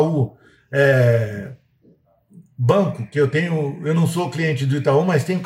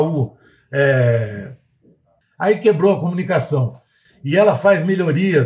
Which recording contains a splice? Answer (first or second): second